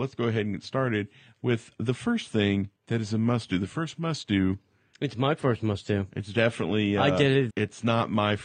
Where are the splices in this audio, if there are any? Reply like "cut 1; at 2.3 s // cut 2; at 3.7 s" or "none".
cut 1; at 2.8 s // cut 2; at 7.5 s

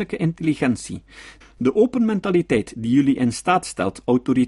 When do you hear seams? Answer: cut 1; at 1.4 s

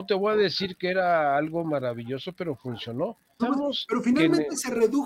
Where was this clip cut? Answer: cut 1; at 3.4 s

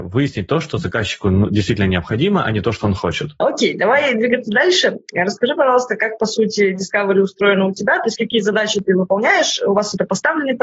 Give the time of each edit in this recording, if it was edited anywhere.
cut 1; at 3.4 s

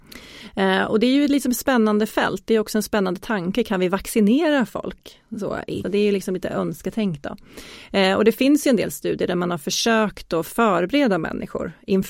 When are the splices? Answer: cut 1; at 5.8 s

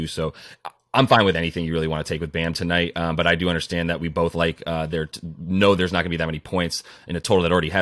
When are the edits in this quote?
none

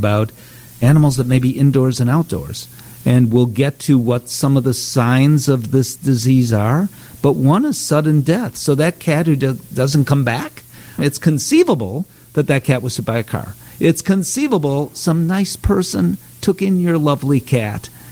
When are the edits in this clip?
cut 1; at 11.0 s

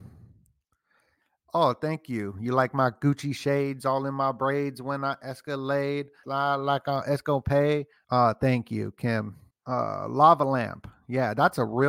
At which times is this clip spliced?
cut 1; at 6.2 s // cut 2; at 8.0 s // cut 3; at 9.5 s

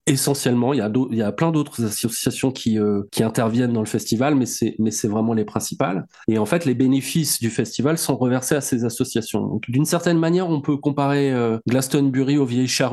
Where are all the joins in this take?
none

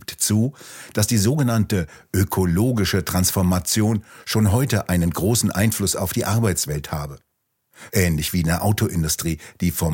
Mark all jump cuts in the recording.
cut 1; at 7.9 s

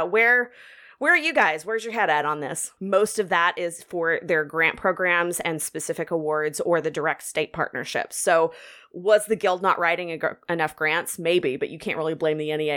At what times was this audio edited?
cut 1; at 2.8 s

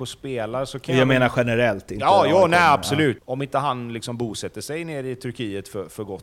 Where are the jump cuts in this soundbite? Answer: cut 1; at 3.2 s

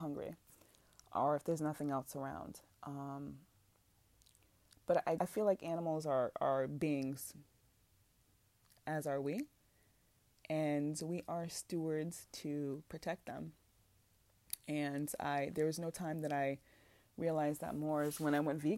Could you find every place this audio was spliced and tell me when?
cut 1; at 5.2 s

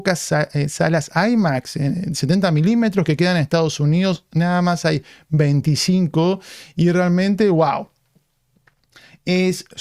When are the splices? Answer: none

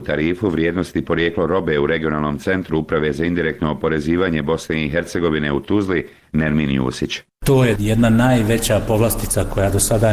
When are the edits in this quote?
cut 1; at 7.8 s

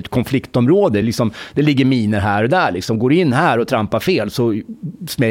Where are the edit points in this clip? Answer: none

